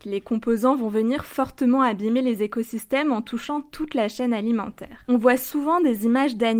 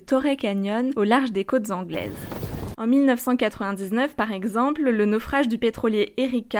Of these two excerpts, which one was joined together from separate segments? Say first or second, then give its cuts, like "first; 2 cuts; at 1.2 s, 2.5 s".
second; 1 cut; at 2.7 s